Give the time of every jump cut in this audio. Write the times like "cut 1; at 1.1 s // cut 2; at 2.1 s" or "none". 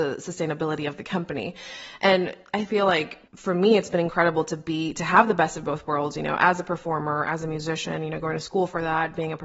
cut 1; at 3.3 s